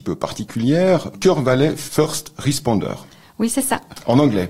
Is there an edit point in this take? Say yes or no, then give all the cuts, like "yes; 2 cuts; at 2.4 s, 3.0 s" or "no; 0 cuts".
yes; 1 cut; at 1.1 s